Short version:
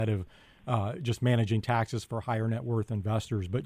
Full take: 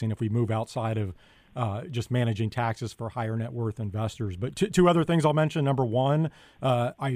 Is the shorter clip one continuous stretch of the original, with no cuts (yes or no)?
yes